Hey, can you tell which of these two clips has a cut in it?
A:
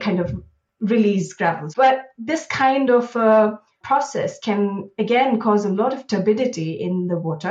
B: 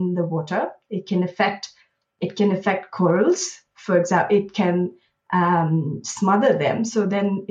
A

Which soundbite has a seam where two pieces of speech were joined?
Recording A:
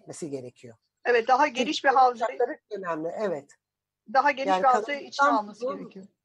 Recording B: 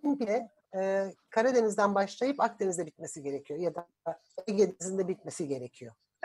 A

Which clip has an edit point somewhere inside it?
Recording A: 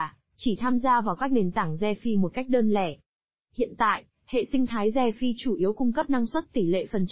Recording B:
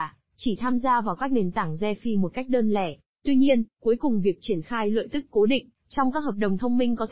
B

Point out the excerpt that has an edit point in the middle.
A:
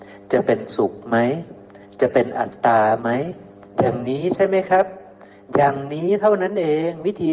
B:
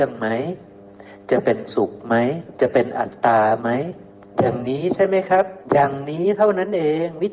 B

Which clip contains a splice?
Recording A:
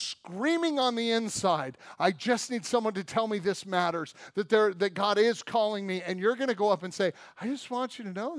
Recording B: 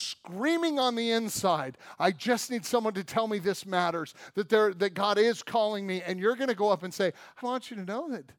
B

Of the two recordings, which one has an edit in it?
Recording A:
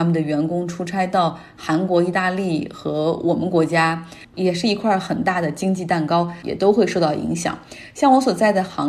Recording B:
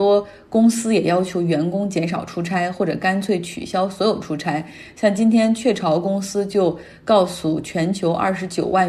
A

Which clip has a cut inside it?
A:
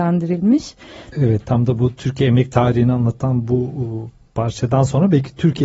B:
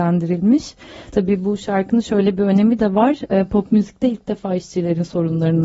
A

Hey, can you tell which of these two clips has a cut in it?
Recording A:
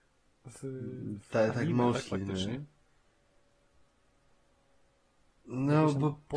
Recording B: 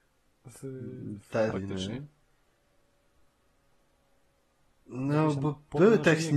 B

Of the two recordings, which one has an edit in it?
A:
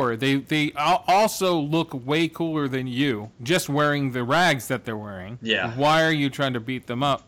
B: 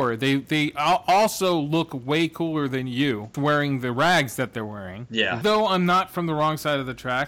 B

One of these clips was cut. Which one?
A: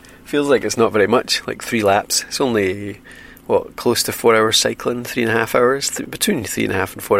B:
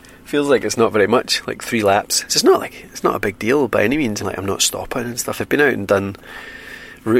B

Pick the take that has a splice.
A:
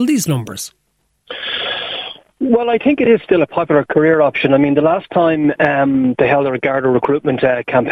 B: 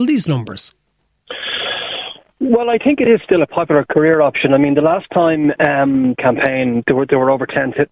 B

